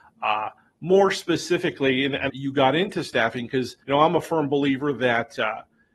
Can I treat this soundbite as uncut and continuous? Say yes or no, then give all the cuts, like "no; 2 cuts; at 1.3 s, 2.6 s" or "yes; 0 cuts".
no; 2 cuts; at 2.3 s, 3.8 s